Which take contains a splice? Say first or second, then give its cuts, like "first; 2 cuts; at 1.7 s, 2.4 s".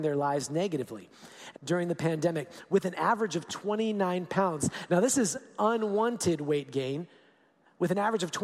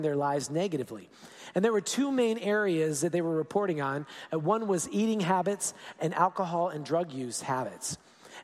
first; 1 cut; at 1.5 s